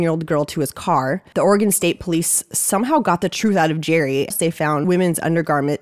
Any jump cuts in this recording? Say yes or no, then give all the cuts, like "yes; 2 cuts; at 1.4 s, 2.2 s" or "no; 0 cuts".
yes; 2 cuts; at 1.3 s, 4.3 s